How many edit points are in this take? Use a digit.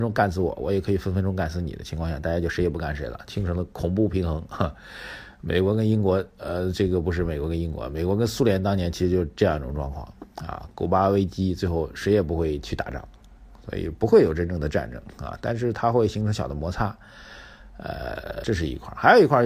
1